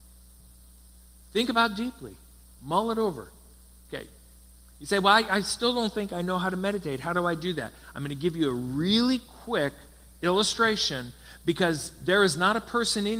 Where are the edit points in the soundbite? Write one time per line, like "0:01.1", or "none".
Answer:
0:02.6

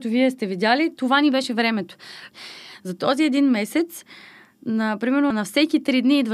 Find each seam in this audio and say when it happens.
0:02.3
0:05.3

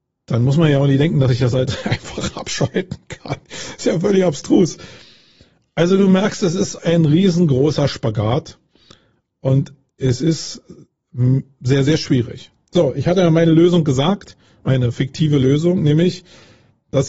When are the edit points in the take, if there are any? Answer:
0:06.8

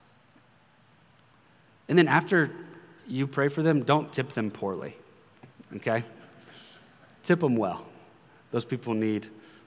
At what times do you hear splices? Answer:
0:01.7

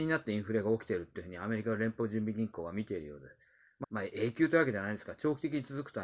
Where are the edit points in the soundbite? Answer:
0:03.8

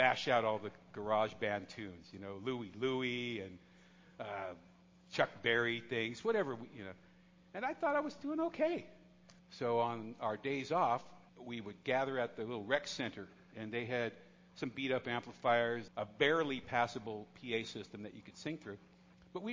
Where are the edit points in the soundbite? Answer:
0:09.4
0:11.3
0:15.9

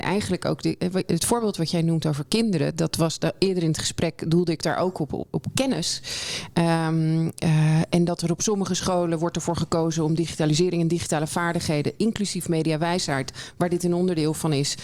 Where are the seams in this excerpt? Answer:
none

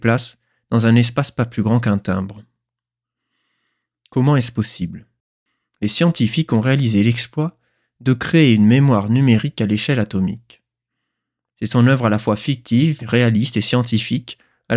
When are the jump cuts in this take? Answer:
0:11.5
0:13.0

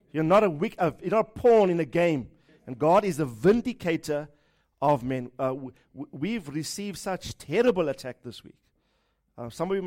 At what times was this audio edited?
0:02.5

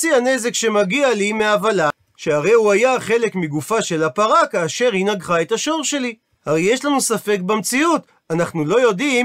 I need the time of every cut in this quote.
0:06.3

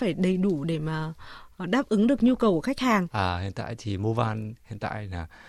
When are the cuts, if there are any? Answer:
0:03.1

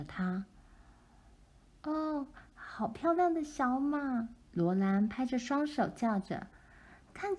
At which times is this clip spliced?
0:04.4

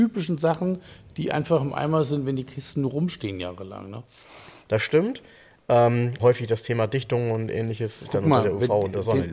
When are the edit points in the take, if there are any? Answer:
0:04.6
0:06.2
0:08.0

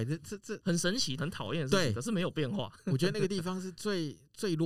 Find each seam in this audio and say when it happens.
0:01.2

